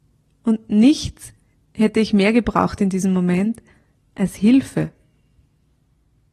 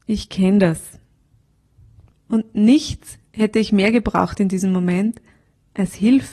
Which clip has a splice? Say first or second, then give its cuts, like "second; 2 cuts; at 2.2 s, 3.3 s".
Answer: second; 2 cuts; at 2.1 s, 3.3 s